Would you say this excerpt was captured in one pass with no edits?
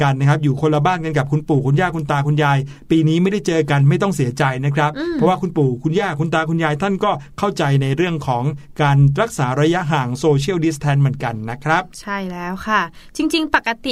yes; 0 cuts

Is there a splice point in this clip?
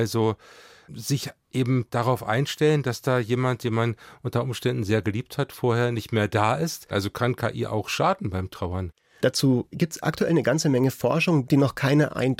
yes; 3 cuts; at 6.9 s, 9.2 s, 11.5 s

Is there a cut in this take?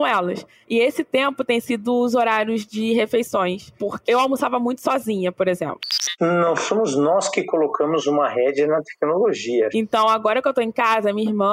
yes; 2 cuts; at 4.1 s, 9.7 s

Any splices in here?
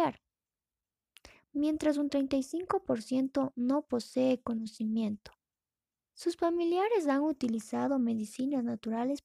yes; 1 cut; at 6.1 s

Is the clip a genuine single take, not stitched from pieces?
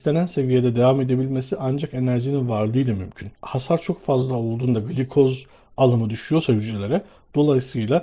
no; 1 cut; at 3.3 s

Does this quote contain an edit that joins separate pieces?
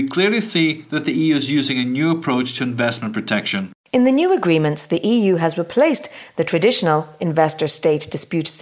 no; 0 cuts

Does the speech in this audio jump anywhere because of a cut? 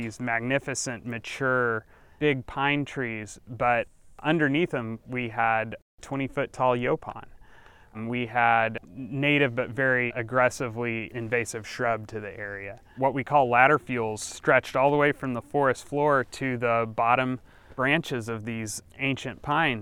no; 0 cuts

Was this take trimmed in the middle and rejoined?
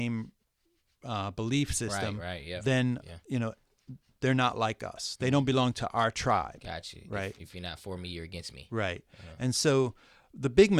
no; 0 cuts

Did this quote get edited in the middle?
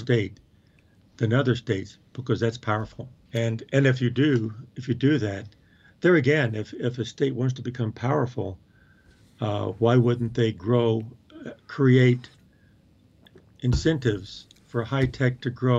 yes; 1 cut; at 3.3 s

